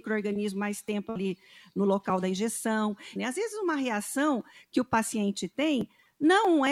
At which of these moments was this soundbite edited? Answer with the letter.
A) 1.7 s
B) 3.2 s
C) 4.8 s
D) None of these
B